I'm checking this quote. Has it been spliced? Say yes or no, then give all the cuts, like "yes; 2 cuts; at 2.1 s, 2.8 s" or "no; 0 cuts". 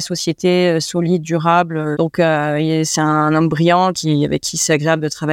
yes; 2 cuts; at 1.9 s, 3.9 s